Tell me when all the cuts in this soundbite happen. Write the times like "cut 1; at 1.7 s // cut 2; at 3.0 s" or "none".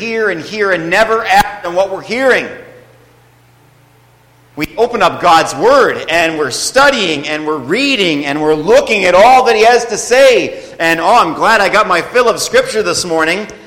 none